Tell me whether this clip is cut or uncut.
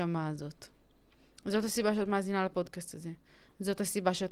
uncut